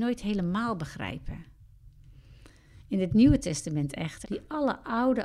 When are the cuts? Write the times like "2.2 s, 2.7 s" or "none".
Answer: 4.2 s